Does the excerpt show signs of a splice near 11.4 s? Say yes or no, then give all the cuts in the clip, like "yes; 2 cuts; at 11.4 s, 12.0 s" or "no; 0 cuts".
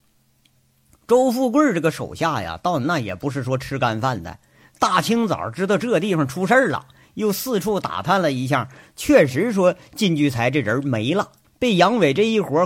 yes; 1 cut; at 11.4 s